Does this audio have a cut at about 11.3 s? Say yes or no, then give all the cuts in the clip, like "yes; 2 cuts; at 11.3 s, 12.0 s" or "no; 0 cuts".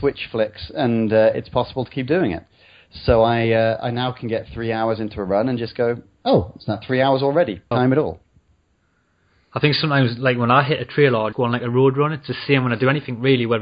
yes; 2 cuts; at 7.7 s, 11.3 s